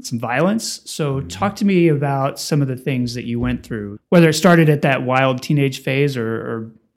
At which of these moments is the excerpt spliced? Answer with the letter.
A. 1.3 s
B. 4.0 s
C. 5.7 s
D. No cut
B